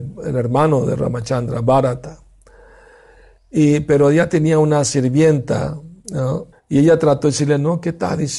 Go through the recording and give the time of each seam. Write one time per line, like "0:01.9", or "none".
0:06.5